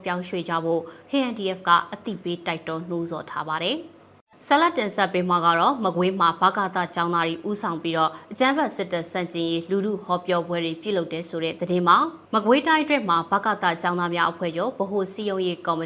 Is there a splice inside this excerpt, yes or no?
yes